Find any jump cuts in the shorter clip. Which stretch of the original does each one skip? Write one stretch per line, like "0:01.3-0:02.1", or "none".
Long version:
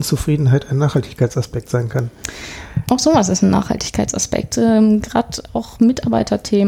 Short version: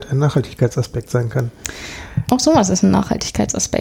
none